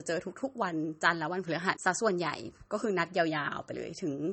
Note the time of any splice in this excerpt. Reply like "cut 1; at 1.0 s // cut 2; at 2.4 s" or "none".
cut 1; at 1.8 s